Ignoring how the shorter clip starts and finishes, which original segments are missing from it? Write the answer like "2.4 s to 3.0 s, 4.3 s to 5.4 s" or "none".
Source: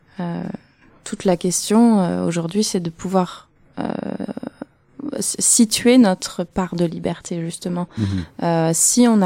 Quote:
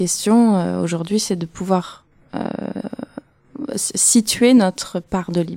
none